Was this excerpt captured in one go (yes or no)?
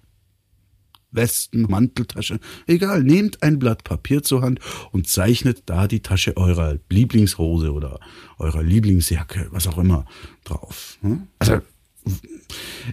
no